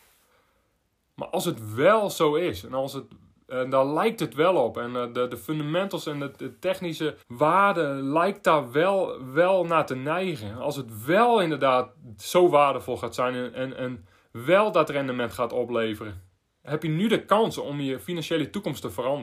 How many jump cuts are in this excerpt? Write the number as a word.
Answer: one